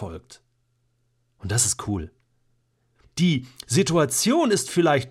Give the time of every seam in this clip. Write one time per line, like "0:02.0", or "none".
0:03.0